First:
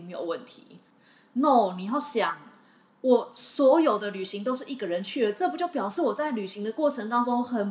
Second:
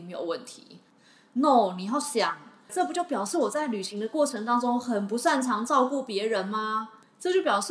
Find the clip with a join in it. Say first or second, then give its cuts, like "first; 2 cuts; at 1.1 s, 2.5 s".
second; 1 cut; at 2.7 s